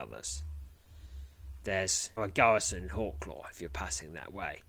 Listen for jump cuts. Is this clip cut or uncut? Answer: cut